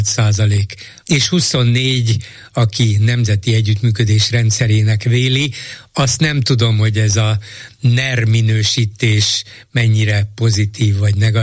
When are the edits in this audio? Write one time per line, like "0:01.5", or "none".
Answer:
0:01.0